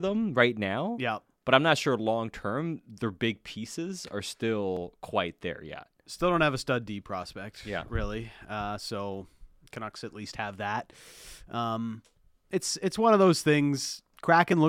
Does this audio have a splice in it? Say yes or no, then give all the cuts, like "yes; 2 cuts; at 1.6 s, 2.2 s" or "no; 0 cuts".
no; 0 cuts